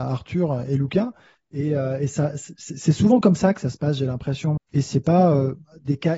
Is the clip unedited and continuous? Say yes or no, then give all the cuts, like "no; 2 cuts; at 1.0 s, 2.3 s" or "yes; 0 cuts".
no; 1 cut; at 4.6 s